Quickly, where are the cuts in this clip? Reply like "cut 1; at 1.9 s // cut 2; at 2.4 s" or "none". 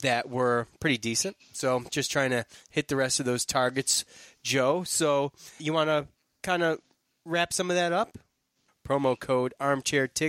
cut 1; at 5.6 s // cut 2; at 8.7 s